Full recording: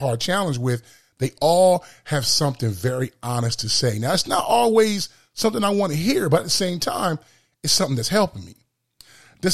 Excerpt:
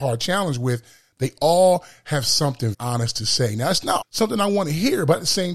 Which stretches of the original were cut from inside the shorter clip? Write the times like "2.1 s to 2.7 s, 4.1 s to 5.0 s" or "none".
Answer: 2.7 s to 3.2 s, 4.4 s to 5.2 s